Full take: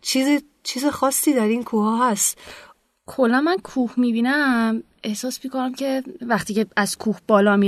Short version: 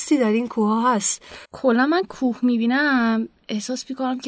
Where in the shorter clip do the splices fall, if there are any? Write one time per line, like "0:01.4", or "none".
0:01.4